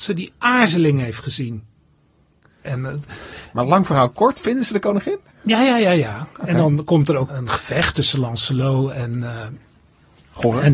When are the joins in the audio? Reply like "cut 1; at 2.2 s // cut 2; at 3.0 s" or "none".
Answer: cut 1; at 2.6 s // cut 2; at 7.3 s